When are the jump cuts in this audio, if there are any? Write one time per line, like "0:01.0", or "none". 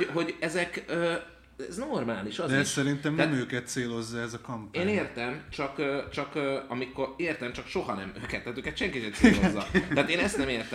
none